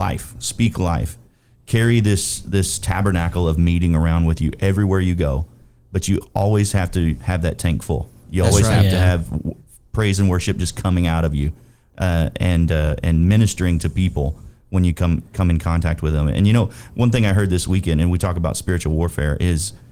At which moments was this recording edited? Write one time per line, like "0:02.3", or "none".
none